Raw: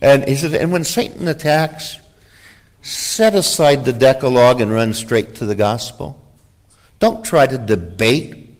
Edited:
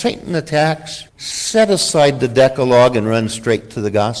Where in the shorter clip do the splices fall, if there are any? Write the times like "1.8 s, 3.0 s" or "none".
1.1 s